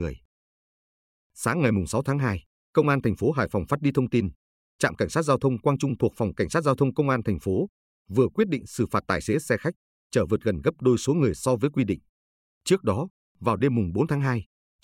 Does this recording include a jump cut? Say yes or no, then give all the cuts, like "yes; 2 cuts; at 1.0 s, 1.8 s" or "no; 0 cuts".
no; 0 cuts